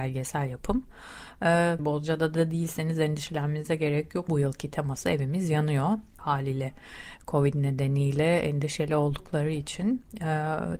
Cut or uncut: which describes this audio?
cut